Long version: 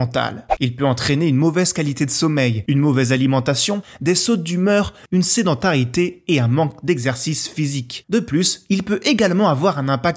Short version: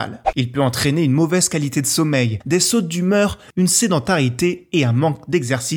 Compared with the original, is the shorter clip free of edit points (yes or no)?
no